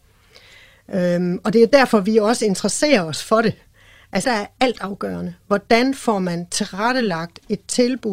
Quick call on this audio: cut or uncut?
cut